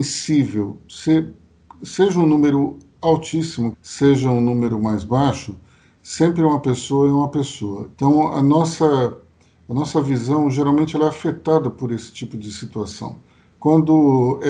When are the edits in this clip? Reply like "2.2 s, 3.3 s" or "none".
3.7 s, 7.9 s

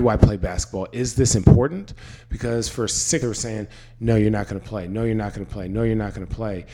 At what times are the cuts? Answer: 3.2 s

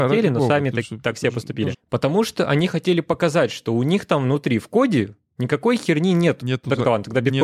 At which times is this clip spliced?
1.7 s, 6.4 s

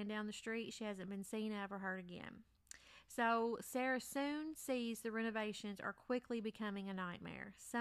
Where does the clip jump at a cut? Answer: none

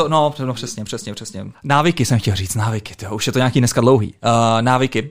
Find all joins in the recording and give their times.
1.5 s

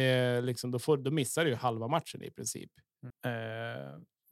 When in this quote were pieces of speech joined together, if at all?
3.1 s

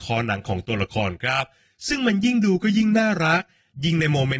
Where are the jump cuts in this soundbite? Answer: none

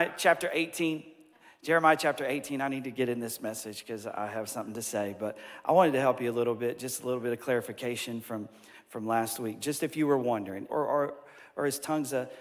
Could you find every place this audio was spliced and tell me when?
10.7 s

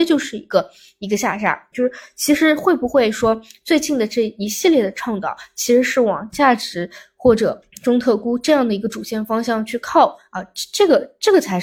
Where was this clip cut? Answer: 1.7 s

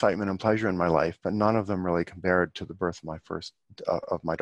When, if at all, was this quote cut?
none

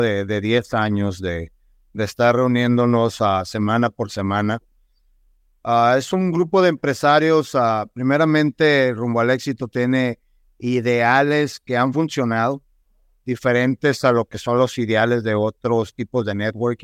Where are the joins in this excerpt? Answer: none

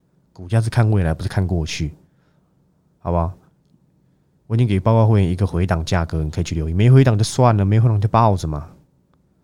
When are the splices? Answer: none

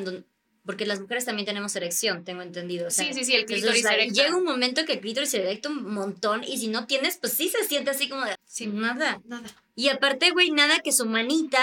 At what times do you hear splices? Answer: 8.3 s

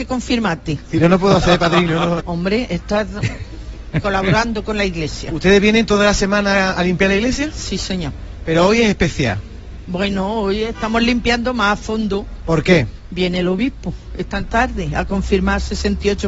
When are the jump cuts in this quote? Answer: 2.2 s

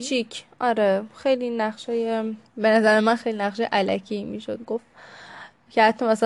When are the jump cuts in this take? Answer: 2.5 s

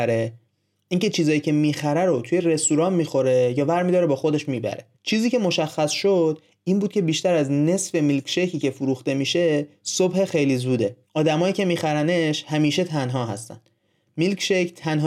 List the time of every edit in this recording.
4.9 s, 11.0 s

